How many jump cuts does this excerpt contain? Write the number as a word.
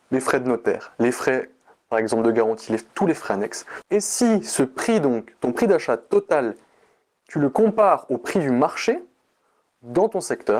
one